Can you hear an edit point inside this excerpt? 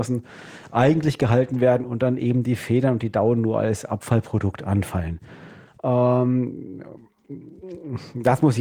yes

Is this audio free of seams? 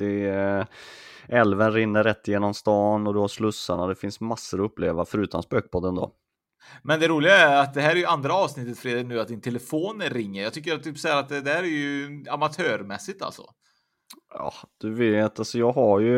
yes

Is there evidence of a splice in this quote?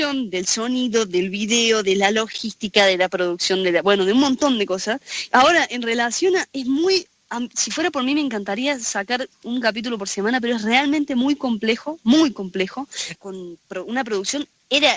yes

